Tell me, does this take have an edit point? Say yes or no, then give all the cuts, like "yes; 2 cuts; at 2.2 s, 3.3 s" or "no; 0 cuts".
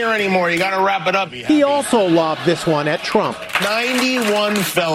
yes; 1 cut; at 3.6 s